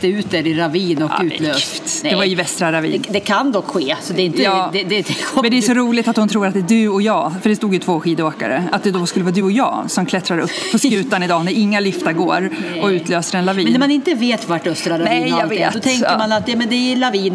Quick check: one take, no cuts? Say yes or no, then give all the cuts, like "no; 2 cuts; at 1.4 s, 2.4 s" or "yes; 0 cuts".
yes; 0 cuts